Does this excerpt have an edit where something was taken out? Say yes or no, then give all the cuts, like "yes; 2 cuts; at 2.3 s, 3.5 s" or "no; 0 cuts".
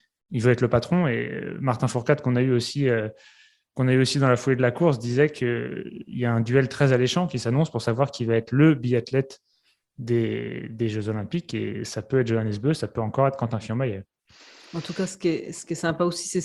no; 0 cuts